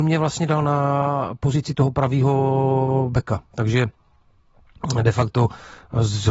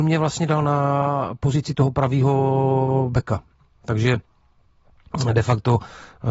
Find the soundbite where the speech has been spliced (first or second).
first